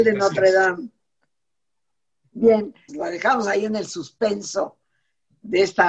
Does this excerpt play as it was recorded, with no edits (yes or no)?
no